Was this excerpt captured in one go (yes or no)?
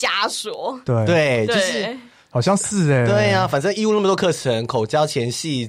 yes